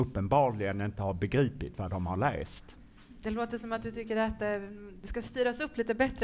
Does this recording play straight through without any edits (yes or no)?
yes